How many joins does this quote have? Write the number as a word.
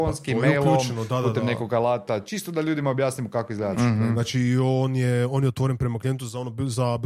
one